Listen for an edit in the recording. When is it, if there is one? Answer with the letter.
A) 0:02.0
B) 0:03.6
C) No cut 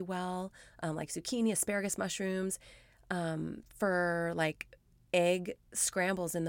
C